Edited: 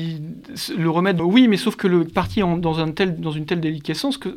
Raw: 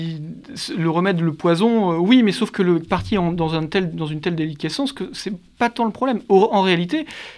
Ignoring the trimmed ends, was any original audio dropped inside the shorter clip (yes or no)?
yes